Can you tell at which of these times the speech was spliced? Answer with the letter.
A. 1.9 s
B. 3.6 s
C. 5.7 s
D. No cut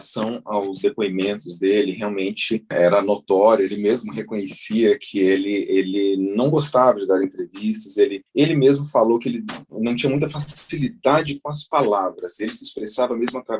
D